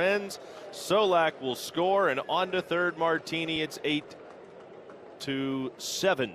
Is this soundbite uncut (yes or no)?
yes